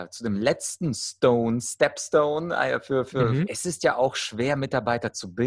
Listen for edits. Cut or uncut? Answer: cut